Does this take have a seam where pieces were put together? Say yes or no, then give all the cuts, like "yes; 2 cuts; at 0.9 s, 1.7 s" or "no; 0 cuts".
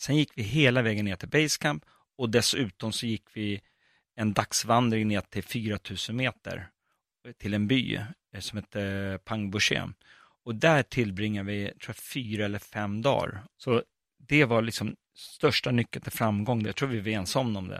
yes; 2 cuts; at 13.6 s, 16.6 s